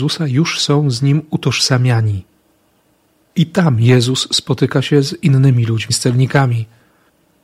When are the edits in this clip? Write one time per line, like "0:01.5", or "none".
0:03.2
0:05.9

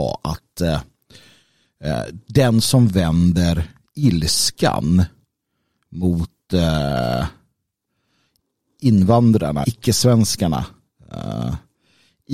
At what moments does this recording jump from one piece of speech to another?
0:09.6

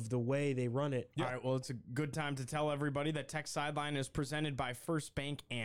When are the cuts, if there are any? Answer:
0:01.1

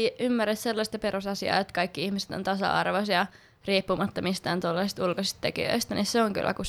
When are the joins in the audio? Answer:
none

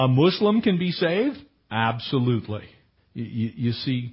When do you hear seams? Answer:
0:03.0

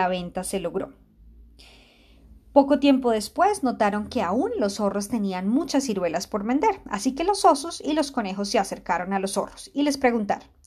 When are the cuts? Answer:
none

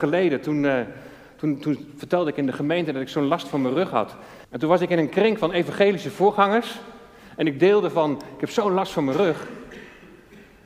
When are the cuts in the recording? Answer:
0:04.4

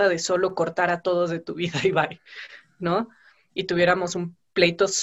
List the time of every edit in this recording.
0:03.5

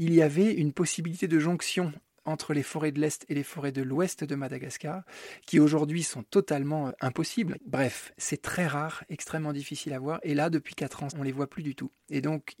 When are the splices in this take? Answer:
0:07.5
0:11.1

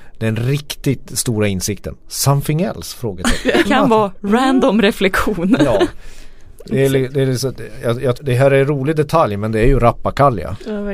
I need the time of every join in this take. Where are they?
0:03.6
0:08.1

